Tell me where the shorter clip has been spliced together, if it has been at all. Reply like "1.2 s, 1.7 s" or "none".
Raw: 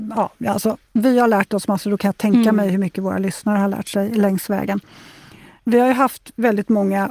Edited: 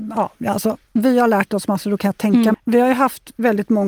2.5 s